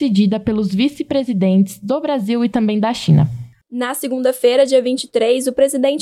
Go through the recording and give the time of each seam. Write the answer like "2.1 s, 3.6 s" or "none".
3.6 s